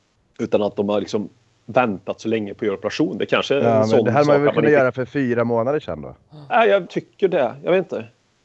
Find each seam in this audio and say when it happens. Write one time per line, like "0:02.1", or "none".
0:06.9